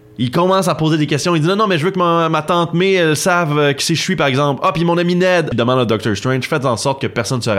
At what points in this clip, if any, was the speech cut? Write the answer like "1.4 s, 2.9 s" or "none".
5.5 s